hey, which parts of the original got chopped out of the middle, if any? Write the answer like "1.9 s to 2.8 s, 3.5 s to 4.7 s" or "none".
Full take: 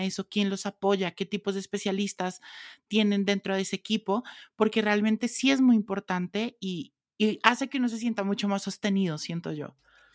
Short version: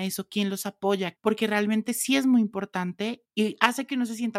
1.1 s to 4.5 s, 6.6 s to 7.1 s